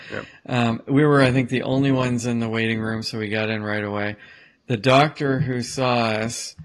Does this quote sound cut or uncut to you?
uncut